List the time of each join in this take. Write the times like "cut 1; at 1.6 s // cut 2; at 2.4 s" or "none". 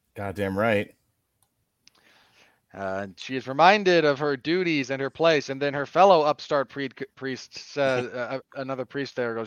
cut 1; at 8.4 s